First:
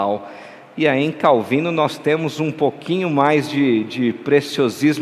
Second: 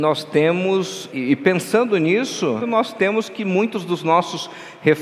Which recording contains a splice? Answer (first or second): second